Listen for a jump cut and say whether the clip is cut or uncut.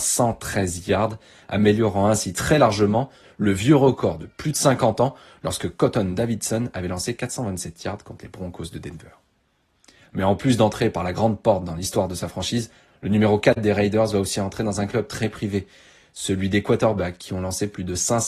uncut